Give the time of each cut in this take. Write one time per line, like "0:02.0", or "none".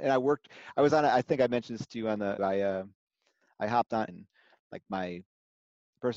0:02.4
0:04.1

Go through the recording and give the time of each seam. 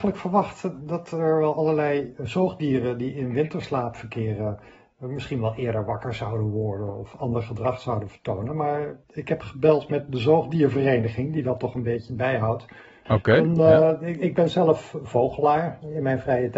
0:09.0
0:13.1

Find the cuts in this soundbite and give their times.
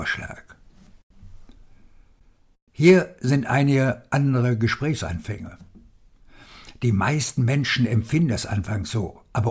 none

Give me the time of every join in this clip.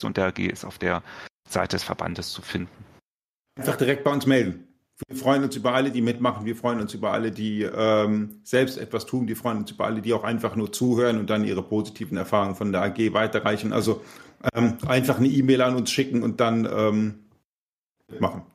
none

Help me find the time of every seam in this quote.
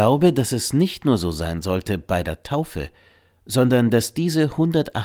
none

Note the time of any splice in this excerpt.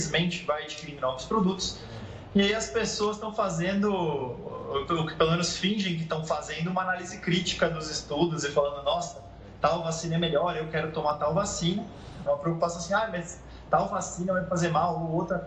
0:12.3

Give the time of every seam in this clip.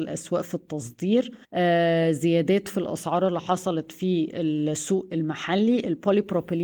0:01.4

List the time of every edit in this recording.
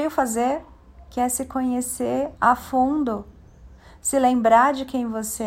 0:02.3

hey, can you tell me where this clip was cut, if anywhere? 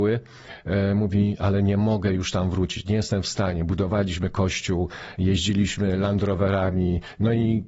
none

